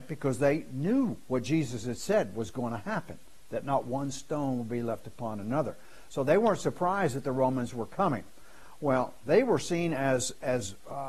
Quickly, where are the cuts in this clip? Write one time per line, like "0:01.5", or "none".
none